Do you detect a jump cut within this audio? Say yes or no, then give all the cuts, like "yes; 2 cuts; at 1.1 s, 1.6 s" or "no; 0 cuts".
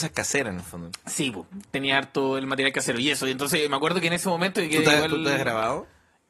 no; 0 cuts